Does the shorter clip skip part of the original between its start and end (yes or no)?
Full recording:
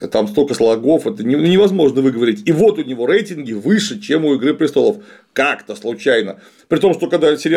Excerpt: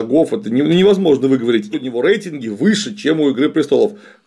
yes